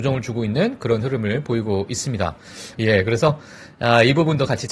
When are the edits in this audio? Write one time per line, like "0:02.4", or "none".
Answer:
0:02.7